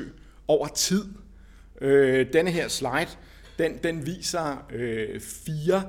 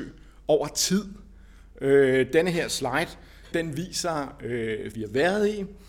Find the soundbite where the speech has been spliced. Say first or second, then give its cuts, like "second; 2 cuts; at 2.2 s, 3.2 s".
second; 2 cuts; at 3.5 s, 4.9 s